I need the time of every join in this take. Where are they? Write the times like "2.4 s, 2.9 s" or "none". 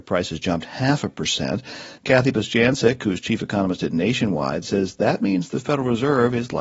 2.0 s